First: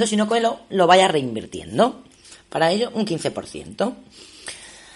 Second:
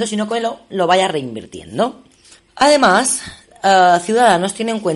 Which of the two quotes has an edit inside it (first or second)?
second